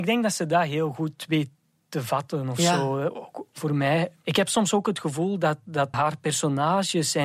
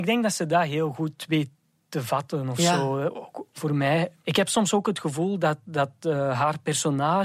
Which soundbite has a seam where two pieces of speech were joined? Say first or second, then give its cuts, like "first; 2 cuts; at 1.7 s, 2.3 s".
first; 1 cut; at 5.9 s